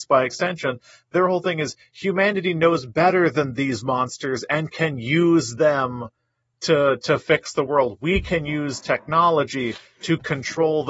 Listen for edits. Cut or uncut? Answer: uncut